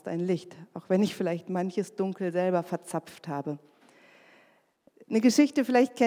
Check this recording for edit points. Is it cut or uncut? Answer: uncut